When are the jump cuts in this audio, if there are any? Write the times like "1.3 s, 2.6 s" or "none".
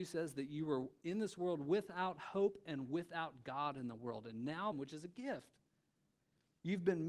4.7 s